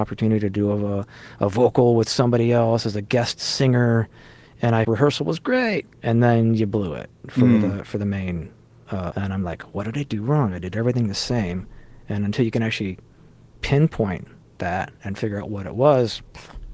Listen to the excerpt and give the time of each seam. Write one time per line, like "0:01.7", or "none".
0:04.8
0:09.1